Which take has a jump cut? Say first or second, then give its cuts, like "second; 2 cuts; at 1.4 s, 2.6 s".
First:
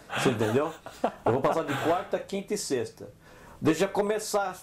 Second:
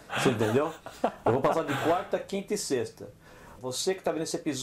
second; 1 cut; at 3.6 s